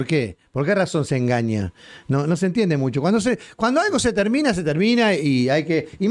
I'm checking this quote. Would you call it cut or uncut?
uncut